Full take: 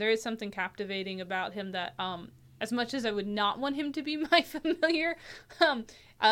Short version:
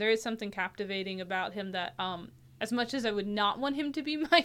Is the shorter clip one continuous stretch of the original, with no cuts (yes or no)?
yes